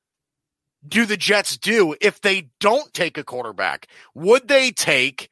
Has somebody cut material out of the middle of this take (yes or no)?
no